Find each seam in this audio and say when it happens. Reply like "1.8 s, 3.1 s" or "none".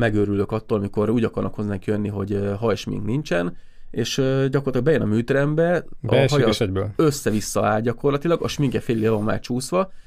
none